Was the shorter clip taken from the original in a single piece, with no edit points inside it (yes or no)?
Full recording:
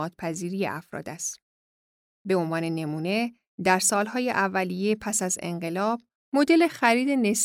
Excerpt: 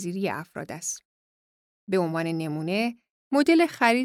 no